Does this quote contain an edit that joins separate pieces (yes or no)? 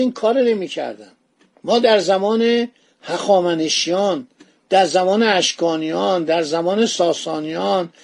no